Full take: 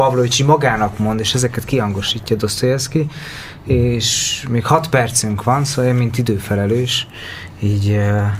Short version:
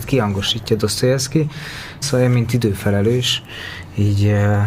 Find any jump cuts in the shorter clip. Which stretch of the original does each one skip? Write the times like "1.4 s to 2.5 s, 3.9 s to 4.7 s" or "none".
3.6 s to 5.7 s